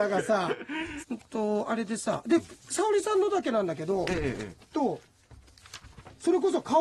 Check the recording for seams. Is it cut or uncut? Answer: cut